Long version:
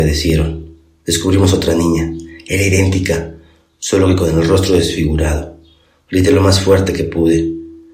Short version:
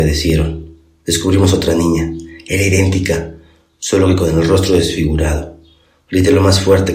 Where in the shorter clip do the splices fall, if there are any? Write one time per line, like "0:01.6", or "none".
none